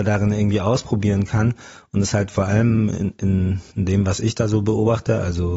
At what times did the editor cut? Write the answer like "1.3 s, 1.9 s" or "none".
3.7 s

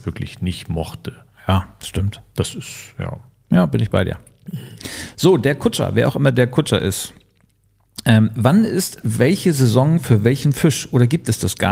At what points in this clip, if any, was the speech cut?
none

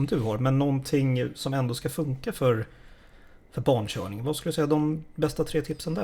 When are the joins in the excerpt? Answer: none

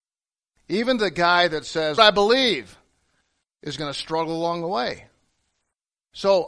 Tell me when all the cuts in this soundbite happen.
2.0 s

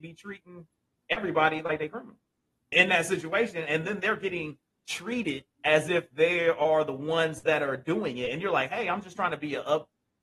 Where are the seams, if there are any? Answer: 2.7 s, 5.5 s

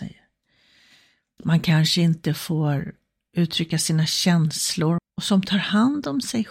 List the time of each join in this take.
1.4 s, 5.0 s

